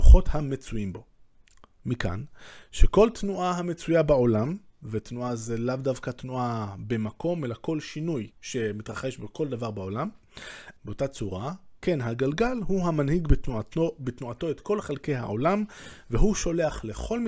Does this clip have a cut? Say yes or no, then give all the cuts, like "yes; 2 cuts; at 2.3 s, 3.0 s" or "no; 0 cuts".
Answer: yes; 2 cuts; at 8.3 s, 10.8 s